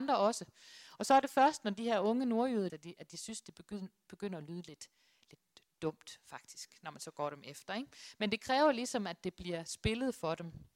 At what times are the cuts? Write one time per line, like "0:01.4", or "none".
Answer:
0:02.7